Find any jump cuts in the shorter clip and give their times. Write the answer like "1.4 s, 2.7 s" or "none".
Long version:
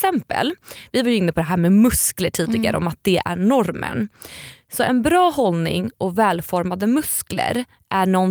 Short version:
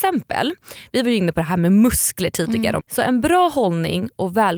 2.8 s